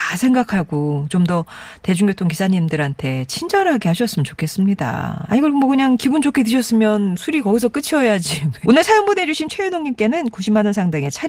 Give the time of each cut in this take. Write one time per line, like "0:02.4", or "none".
0:05.3
0:08.6